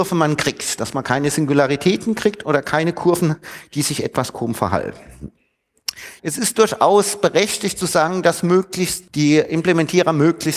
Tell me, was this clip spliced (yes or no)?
yes